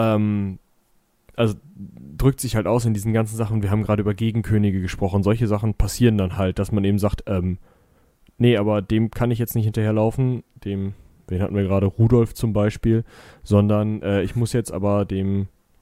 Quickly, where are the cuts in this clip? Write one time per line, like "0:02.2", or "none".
none